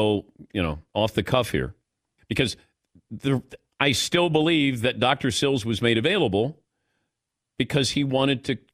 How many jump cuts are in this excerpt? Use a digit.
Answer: 1